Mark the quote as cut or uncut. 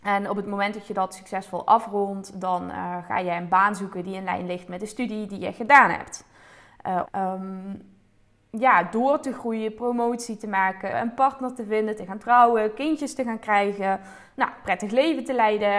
cut